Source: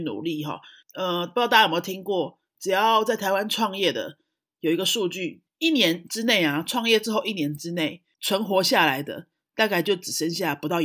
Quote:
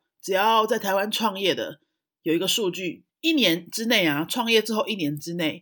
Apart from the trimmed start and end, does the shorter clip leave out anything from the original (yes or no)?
no